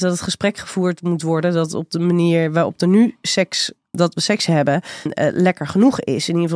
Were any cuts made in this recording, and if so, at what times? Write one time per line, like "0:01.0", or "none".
0:03.9
0:05.1

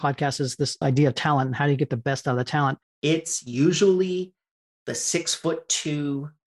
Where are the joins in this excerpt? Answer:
0:02.8

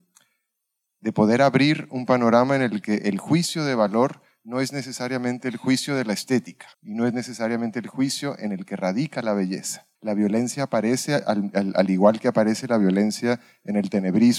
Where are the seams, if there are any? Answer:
0:06.7
0:09.9

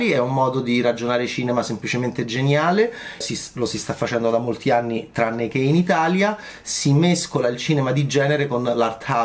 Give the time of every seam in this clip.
0:03.2

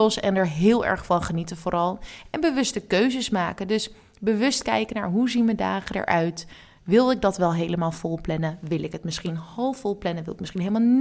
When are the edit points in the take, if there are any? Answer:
none

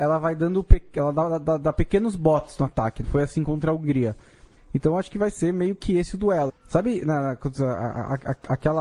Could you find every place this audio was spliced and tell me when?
0:03.0
0:04.6
0:06.5

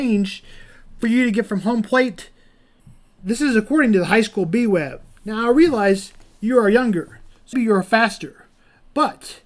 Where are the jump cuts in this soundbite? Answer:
0:07.5

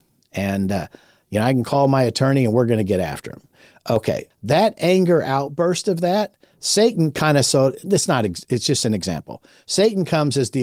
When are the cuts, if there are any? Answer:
0:04.3

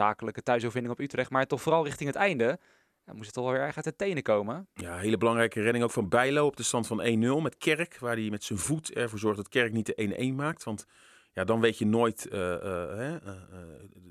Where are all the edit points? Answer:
none

